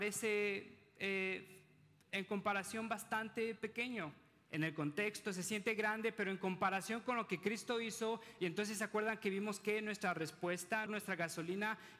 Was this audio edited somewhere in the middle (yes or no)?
yes